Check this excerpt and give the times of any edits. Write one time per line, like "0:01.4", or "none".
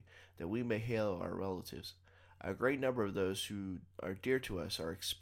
0:03.9